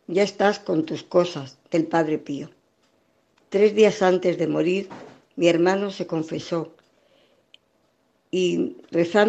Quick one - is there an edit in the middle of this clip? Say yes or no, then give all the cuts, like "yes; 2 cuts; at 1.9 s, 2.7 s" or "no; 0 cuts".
no; 0 cuts